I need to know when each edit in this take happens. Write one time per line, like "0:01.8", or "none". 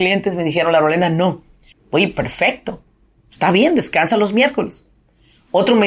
0:01.7